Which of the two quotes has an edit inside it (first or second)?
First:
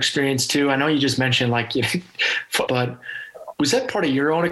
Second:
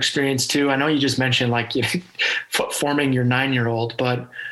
first